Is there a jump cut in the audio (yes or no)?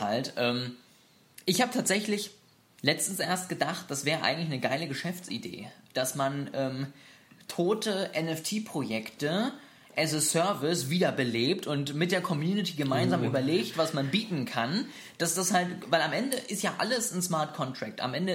no